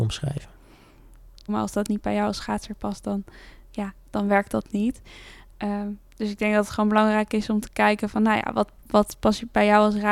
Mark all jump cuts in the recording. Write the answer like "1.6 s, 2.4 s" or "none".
1.5 s